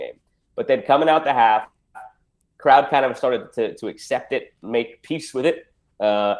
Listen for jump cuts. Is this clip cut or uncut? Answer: uncut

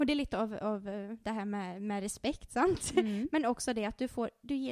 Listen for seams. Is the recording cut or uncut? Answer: uncut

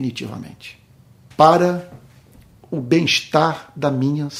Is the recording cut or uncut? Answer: cut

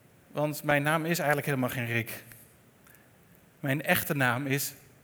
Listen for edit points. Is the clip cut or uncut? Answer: uncut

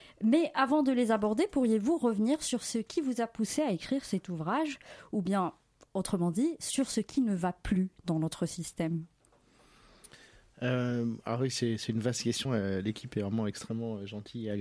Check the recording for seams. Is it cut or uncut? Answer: cut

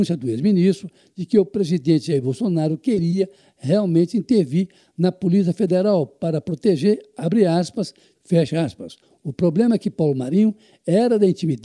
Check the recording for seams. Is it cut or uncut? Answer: cut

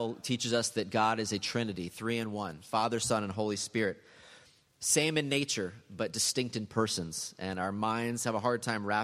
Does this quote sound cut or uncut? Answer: uncut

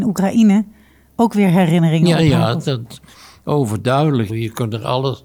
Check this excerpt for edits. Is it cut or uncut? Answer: cut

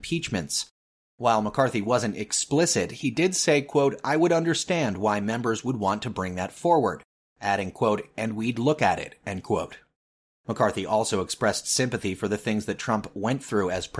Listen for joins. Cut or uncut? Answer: uncut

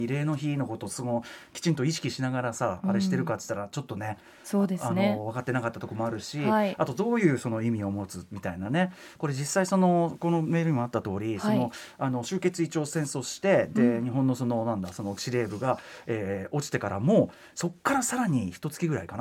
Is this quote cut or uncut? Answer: uncut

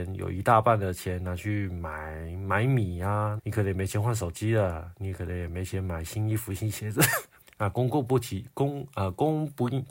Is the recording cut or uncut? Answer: cut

